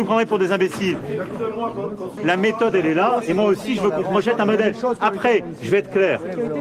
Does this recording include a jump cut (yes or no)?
yes